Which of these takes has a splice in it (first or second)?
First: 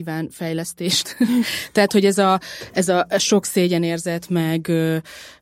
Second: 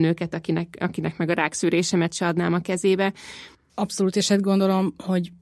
second